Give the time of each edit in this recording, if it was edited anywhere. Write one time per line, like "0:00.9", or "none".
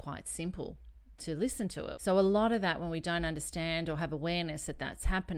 0:02.0